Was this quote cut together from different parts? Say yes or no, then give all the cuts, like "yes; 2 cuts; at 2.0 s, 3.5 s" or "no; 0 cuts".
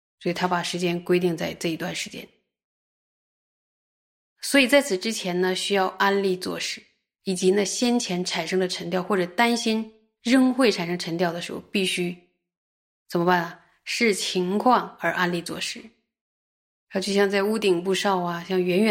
no; 0 cuts